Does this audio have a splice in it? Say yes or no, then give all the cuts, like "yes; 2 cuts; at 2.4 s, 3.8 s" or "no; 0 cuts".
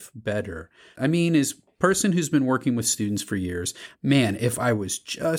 yes; 2 cuts; at 0.9 s, 3.9 s